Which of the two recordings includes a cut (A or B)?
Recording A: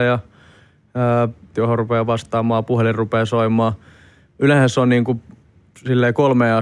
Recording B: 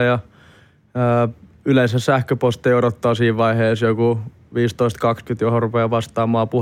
A